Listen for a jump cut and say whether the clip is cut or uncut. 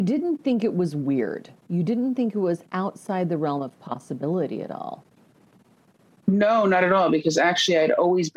uncut